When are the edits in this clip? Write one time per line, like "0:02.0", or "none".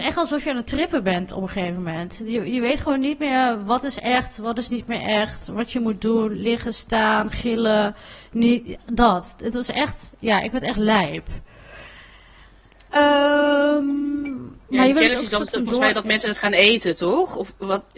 0:14.7